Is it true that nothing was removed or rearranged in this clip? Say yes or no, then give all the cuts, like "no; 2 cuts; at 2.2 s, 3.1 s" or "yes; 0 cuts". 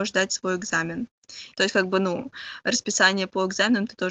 no; 1 cut; at 1.5 s